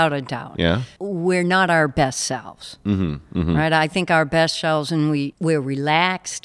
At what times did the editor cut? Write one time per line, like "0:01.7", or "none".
0:01.0